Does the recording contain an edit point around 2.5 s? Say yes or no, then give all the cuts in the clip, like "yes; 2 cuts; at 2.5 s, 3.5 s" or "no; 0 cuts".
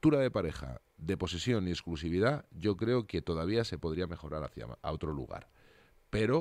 no; 1 cut; at 4.8 s